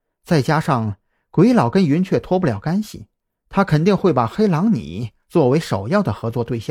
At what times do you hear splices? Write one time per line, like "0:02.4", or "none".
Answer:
none